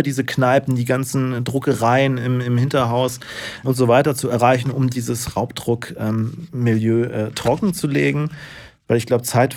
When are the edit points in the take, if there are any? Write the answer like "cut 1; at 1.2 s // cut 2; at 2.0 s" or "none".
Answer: cut 1; at 3.6 s